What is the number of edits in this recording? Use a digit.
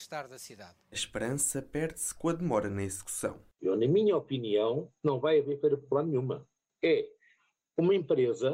1